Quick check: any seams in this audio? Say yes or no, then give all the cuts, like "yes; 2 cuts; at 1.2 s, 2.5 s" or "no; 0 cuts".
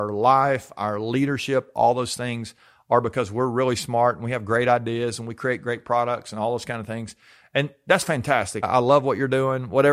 yes; 1 cut; at 8.6 s